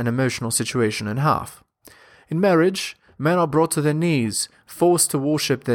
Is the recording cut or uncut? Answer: uncut